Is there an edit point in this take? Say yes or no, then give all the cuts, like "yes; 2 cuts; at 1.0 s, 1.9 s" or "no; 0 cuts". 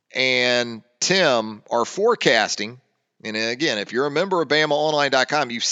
no; 0 cuts